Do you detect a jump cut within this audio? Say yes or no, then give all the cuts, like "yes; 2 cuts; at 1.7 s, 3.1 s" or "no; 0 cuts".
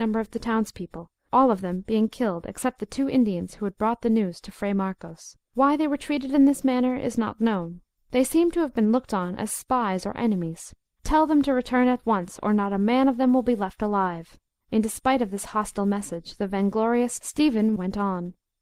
yes; 2 cuts; at 5.4 s, 11.0 s